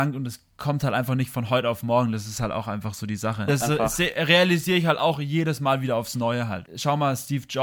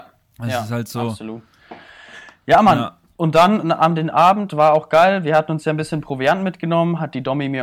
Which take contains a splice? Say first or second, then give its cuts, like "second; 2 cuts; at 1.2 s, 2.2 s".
first; 2 cuts; at 3.5 s, 6.6 s